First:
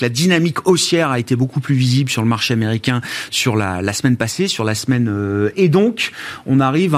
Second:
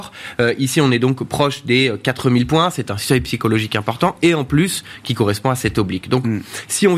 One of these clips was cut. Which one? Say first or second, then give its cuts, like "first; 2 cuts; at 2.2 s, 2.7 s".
first; 1 cut; at 5.5 s